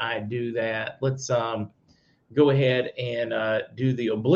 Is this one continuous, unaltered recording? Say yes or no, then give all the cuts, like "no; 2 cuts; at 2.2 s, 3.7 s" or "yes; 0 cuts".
yes; 0 cuts